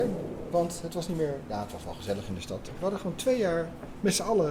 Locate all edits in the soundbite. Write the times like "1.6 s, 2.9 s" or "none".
2.7 s